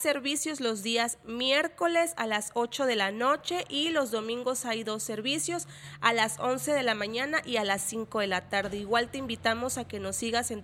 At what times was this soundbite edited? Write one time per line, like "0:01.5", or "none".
none